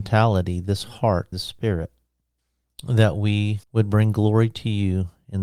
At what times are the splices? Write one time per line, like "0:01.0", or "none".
0:01.3
0:03.6